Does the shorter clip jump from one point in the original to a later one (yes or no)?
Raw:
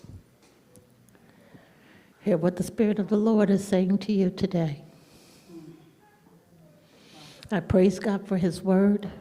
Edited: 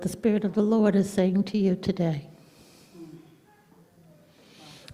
no